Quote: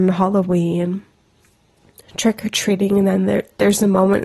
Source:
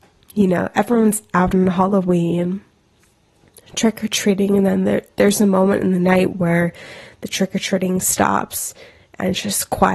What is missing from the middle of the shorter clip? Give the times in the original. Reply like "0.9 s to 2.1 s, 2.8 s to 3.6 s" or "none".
none